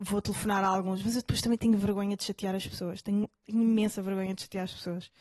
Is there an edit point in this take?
no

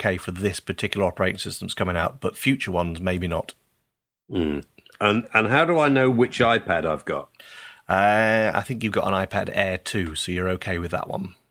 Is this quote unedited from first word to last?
yes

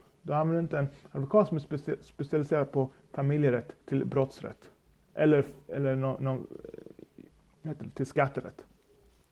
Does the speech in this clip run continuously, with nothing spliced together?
no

